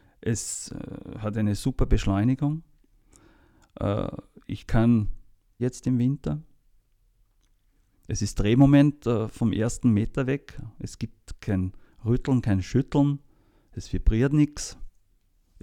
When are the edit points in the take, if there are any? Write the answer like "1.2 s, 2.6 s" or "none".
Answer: 5.6 s